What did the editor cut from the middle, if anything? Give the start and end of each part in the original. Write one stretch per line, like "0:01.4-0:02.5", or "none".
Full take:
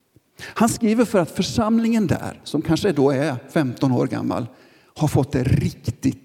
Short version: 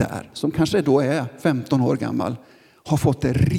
none